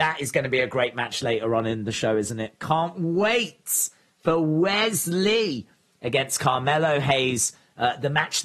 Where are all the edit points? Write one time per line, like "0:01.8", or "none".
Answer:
none